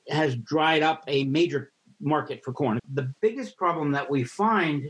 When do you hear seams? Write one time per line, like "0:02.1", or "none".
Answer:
0:02.8